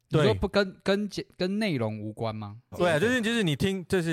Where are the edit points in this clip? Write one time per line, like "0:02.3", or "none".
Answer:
0:02.7